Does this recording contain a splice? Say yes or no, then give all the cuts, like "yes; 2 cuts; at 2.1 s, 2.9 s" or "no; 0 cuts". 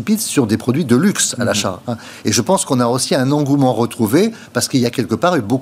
no; 0 cuts